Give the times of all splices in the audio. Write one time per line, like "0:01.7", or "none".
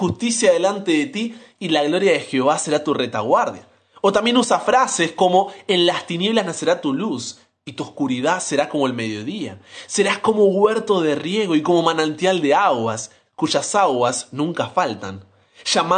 none